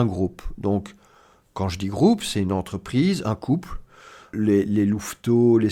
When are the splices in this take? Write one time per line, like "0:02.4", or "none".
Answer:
0:04.3